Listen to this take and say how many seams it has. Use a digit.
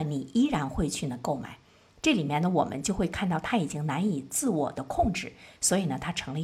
1